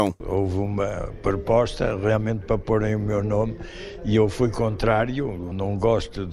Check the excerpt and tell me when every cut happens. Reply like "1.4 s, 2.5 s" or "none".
none